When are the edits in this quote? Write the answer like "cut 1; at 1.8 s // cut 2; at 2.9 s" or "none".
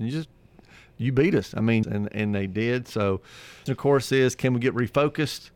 cut 1; at 1.8 s // cut 2; at 3.7 s